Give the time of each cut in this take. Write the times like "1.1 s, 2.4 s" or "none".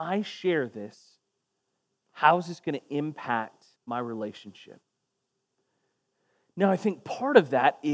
3.8 s